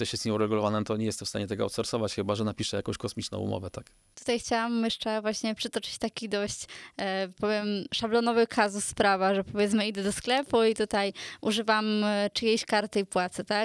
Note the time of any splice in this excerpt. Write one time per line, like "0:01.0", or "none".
none